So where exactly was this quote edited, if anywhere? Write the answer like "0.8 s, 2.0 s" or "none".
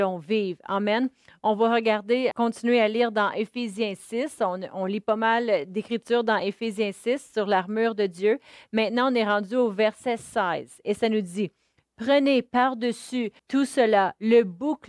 2.3 s, 13.4 s